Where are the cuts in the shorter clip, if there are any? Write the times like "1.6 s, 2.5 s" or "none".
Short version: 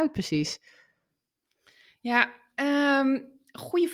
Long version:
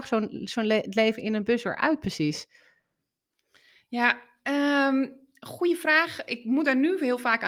none